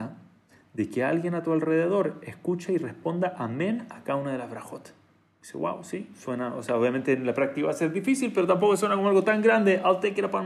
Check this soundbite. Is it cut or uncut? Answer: cut